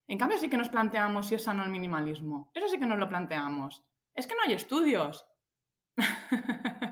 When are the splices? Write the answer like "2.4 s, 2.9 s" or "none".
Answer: 5.5 s